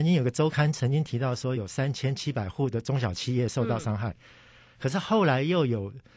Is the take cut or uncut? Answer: uncut